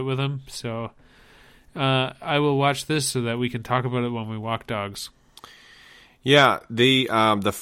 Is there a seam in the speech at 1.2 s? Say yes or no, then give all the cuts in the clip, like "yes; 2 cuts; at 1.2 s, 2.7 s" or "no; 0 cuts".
no; 0 cuts